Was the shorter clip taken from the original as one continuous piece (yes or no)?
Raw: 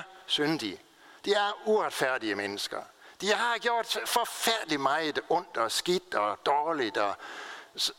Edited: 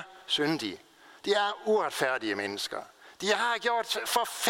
yes